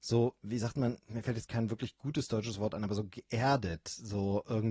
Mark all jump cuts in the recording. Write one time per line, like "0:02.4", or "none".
0:01.5